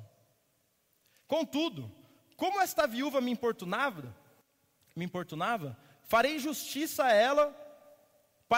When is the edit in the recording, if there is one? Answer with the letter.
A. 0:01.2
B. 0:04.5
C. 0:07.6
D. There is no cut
A